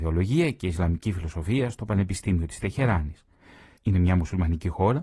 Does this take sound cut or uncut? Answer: cut